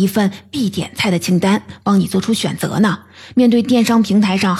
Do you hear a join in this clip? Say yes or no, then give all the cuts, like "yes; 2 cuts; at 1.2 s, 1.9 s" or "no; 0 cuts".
no; 0 cuts